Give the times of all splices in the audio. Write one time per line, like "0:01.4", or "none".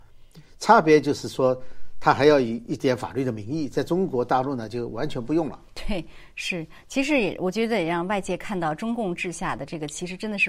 none